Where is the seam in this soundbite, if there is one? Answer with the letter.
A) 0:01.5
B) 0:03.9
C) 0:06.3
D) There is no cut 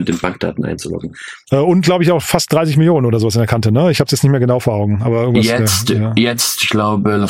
A